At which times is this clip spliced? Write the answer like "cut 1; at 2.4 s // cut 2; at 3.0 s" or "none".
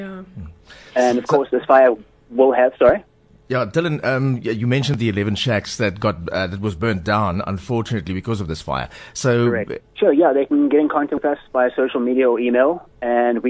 cut 1; at 9.8 s